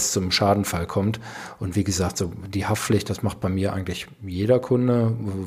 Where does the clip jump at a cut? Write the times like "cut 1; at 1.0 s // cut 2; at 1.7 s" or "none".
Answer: none